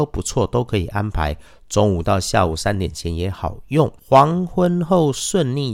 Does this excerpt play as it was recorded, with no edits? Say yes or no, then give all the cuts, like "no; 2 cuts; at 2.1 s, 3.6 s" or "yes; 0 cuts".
no; 1 cut; at 4.0 s